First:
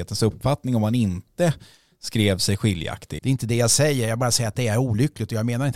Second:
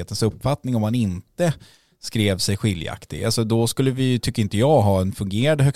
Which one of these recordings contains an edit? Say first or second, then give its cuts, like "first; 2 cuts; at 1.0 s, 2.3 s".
first; 1 cut; at 3.2 s